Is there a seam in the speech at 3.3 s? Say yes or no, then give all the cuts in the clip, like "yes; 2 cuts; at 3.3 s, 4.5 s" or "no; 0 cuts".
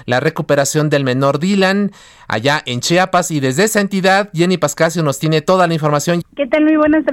no; 1 cut; at 6.2 s